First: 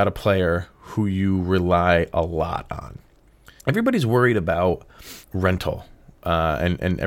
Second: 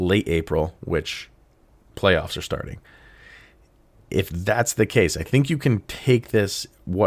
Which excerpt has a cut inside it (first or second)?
first